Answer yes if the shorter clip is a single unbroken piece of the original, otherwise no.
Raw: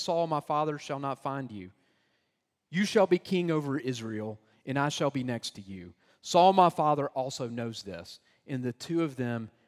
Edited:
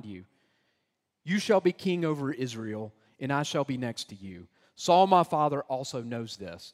yes